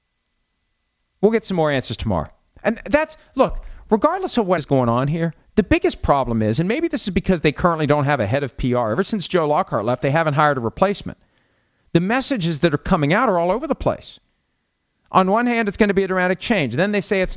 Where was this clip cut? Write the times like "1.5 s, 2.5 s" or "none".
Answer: 4.6 s